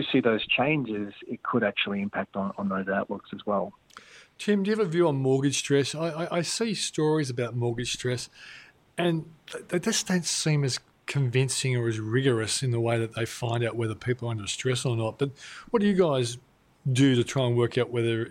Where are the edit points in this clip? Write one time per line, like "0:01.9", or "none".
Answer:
none